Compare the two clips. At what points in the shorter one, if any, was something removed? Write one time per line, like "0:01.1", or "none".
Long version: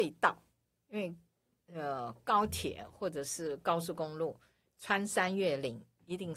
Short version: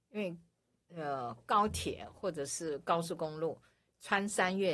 none